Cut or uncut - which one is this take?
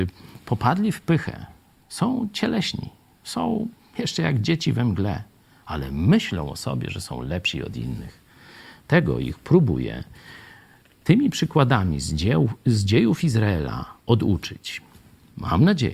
uncut